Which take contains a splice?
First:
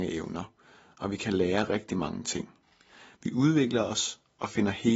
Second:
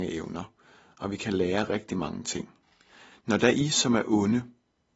second; 1 cut; at 3.1 s

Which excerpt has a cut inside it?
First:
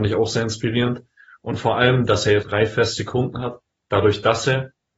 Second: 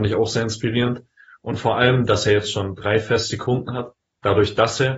first; 1 cut; at 2.4 s

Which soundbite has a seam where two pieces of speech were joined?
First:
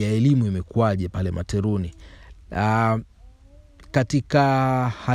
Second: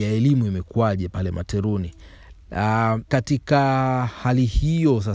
second; 1 cut; at 3.1 s

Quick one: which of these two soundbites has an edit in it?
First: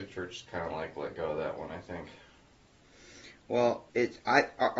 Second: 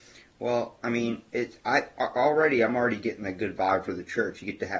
first; 1 cut; at 3.9 s

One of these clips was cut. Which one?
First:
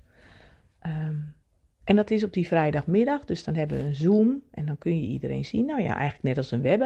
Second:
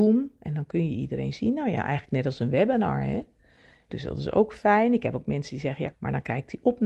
second; 2 cuts; at 3.9 s, 5.9 s

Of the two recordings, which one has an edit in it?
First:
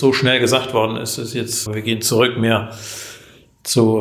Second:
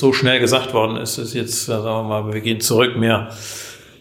first; 1 cut; at 1.7 s

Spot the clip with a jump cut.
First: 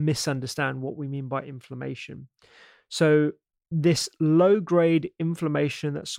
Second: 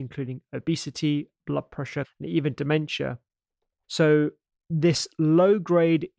second; 2 cuts; at 2.0 s, 3.8 s

